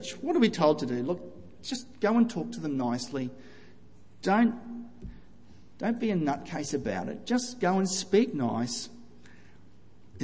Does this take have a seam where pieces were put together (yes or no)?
no